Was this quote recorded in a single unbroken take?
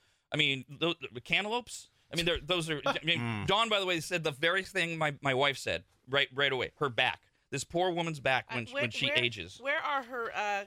yes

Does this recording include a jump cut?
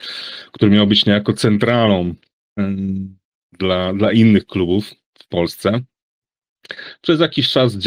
no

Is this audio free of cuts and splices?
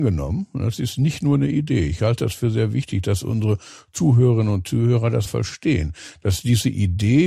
no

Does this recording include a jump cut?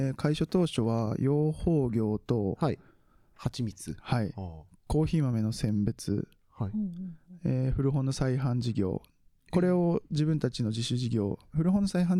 no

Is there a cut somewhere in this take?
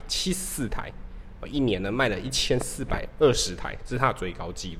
no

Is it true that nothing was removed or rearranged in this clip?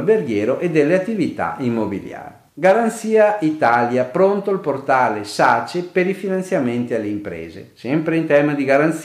no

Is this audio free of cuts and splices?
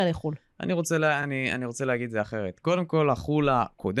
yes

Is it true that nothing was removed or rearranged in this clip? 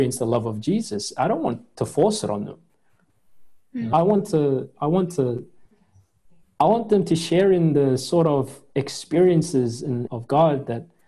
no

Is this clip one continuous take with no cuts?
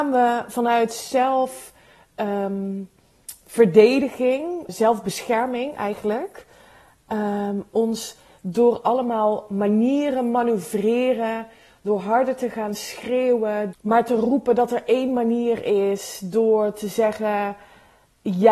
no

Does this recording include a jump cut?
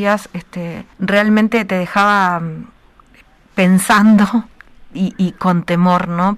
yes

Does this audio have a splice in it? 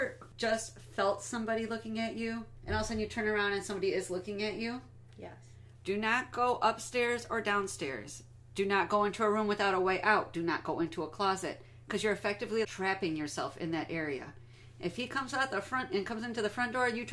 yes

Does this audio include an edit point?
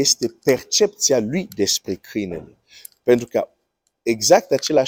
no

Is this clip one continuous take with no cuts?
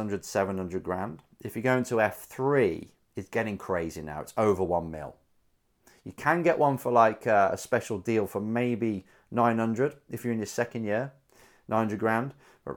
yes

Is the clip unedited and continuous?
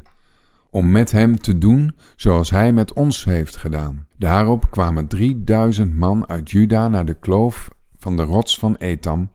no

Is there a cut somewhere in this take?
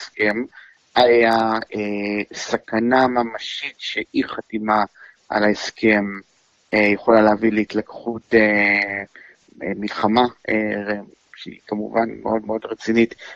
no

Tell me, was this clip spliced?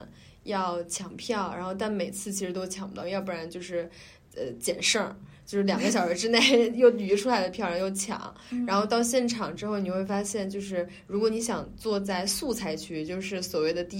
yes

